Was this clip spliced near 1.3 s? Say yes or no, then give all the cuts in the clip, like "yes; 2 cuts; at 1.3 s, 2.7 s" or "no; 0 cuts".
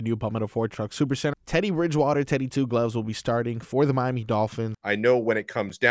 yes; 2 cuts; at 1.3 s, 4.7 s